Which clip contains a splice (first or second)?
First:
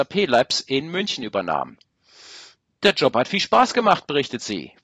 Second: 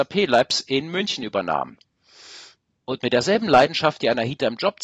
second